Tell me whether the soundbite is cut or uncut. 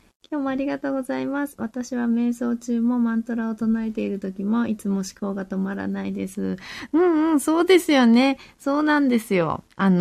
uncut